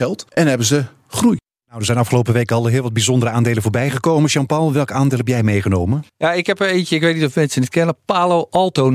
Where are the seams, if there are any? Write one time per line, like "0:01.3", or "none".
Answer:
0:06.1